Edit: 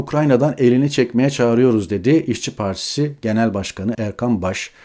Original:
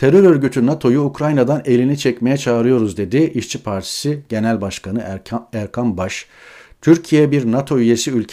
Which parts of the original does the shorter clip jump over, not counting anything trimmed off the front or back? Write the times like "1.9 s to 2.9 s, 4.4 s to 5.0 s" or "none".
5.0 s to 5.5 s